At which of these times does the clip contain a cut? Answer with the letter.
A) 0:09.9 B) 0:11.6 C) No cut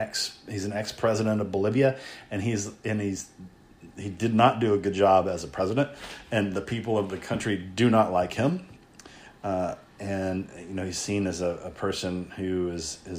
A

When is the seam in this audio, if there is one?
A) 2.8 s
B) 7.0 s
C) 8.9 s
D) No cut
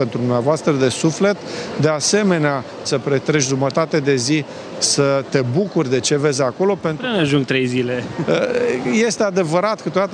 A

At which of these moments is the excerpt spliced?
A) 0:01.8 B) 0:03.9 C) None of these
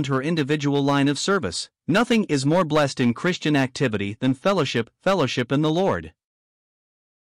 A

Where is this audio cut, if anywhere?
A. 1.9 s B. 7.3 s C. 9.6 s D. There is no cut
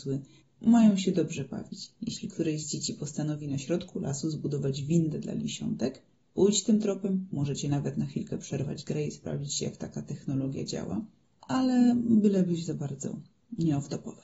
D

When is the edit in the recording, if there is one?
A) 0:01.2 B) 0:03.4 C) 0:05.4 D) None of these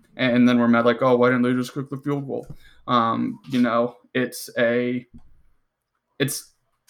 B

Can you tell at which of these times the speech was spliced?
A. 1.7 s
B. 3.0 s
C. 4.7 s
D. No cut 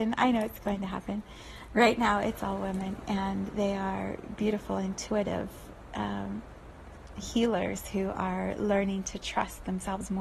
D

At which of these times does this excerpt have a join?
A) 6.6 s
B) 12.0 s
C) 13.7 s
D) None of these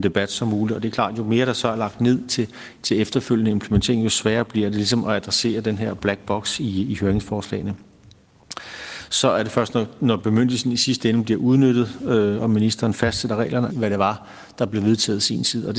C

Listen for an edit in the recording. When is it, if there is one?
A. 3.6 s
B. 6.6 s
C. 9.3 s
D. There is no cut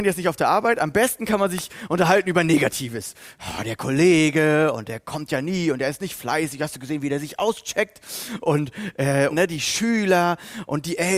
C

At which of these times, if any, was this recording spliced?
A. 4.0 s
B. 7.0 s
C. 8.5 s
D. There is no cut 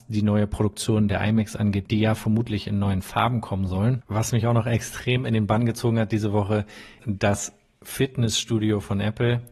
B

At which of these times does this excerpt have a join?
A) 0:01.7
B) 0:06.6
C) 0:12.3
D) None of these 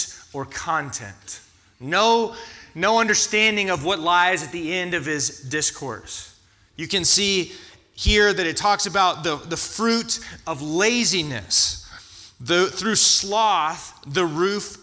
D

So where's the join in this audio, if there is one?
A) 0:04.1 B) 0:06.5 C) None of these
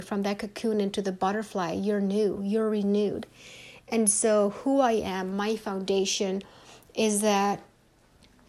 C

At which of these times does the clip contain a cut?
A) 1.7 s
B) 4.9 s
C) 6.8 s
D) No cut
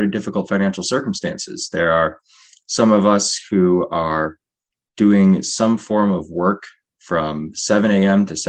D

